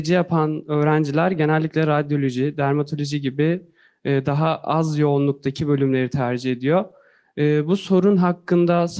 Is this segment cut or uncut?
uncut